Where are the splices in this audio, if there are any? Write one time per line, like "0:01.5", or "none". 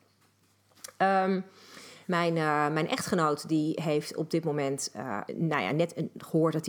0:02.0
0:05.3